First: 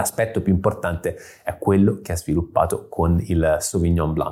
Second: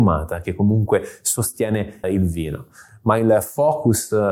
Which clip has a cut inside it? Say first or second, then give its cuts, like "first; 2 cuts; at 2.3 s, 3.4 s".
second; 1 cut; at 2.0 s